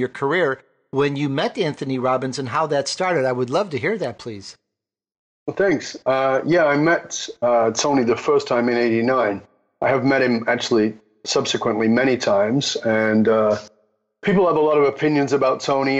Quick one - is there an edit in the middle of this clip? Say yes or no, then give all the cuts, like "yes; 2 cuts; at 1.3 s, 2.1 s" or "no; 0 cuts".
no; 0 cuts